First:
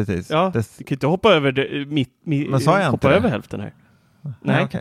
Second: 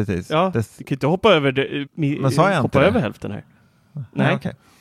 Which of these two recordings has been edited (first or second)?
second